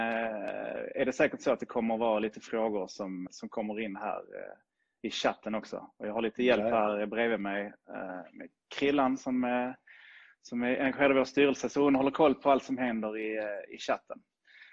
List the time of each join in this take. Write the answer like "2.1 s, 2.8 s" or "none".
3.3 s